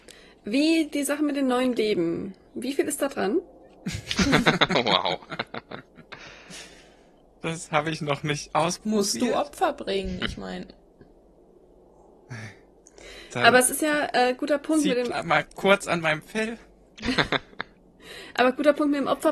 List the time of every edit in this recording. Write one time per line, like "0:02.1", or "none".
none

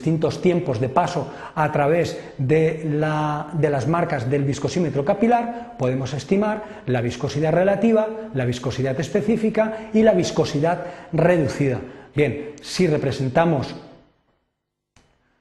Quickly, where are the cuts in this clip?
0:12.1

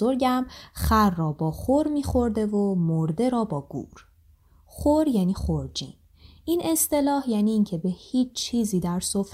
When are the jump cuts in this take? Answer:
none

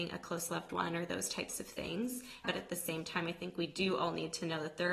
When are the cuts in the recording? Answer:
0:02.4

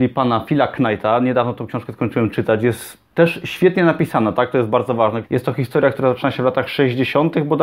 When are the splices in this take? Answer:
0:03.1
0:05.2

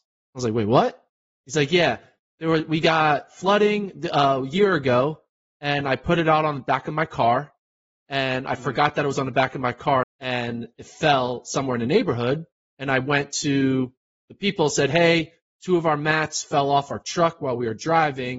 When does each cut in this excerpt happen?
0:10.0

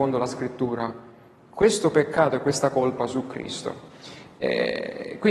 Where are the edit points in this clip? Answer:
none

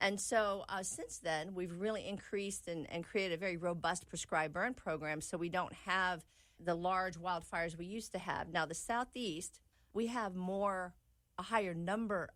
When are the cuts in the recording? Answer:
none

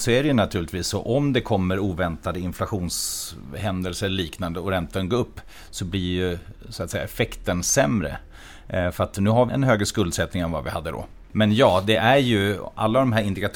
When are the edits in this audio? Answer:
0:09.5
0:11.3

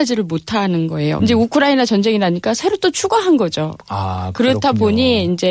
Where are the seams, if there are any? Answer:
0:01.2

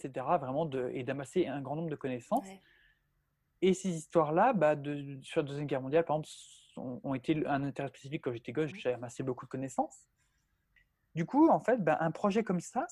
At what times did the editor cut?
0:08.7

